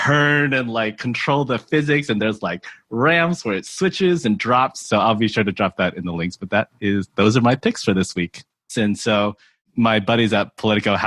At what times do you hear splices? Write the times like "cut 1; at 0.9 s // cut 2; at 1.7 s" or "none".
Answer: cut 1; at 4.8 s // cut 2; at 8.7 s